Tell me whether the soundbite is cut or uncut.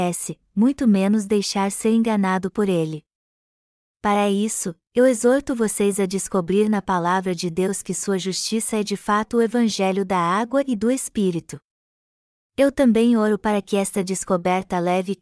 uncut